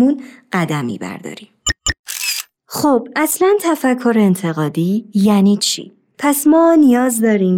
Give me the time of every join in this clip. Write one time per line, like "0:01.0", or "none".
0:06.1

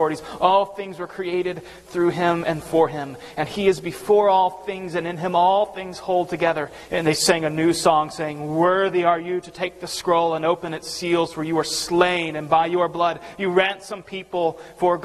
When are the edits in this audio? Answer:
0:06.9

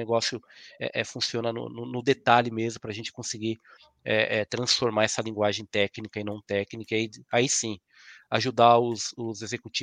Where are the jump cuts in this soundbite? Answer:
none

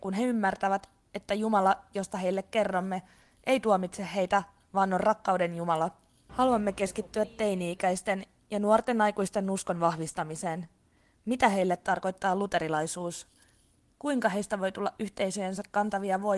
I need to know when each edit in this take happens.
0:06.3

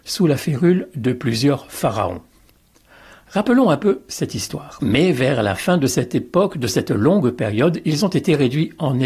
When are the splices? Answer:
0:04.8

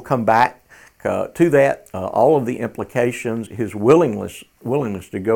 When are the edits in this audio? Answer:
0:03.5

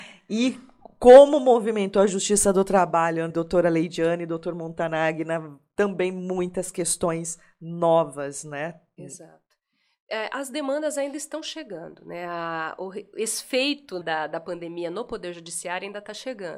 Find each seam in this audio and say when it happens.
0:03.3
0:14.0

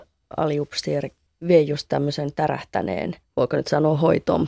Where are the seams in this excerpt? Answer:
none

